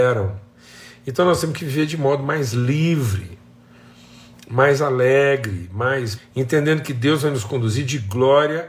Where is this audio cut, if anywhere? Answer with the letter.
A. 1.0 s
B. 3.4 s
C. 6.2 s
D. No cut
C